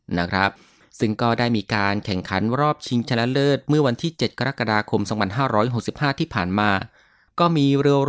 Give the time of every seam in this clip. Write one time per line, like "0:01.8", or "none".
none